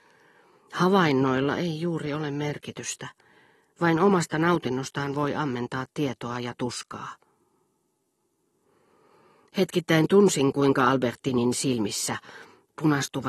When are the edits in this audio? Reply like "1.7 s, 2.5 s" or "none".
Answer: none

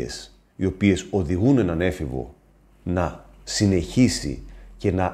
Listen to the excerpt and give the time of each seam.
none

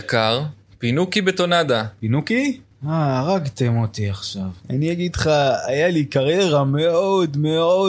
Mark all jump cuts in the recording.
2.8 s, 4.6 s

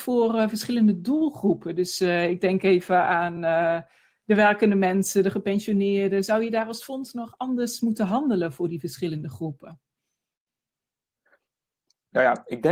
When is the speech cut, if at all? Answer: none

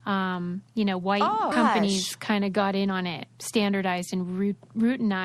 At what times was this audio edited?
1.5 s, 3.3 s

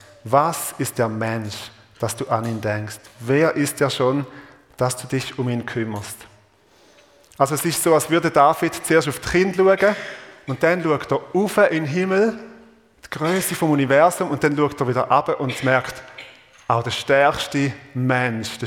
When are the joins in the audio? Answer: none

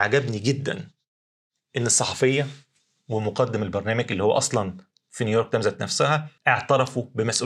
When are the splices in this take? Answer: 6.4 s

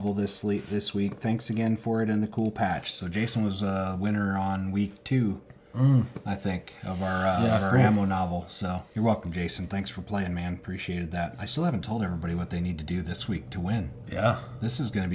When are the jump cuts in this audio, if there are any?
8.9 s

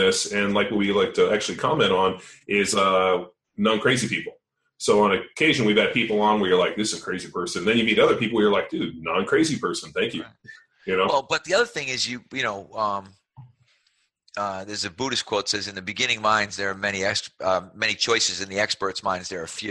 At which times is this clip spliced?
none

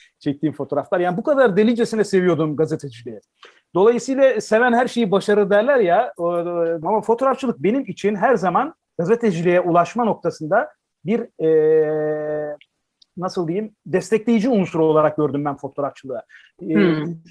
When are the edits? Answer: 6.8 s

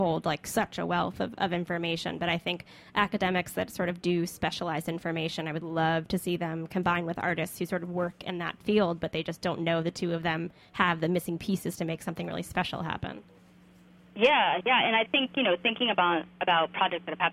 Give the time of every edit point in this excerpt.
none

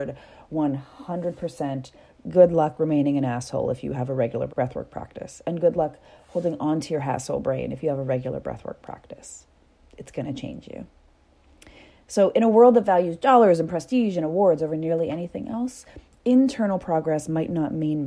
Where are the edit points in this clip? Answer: 4.5 s

